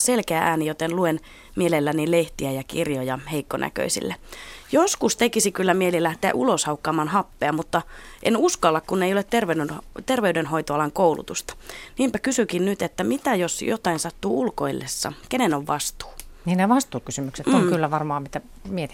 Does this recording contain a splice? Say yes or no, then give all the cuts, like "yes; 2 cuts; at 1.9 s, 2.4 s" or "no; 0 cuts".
no; 0 cuts